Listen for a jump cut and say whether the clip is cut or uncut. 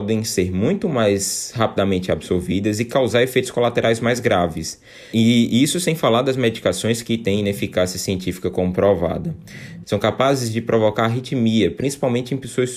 cut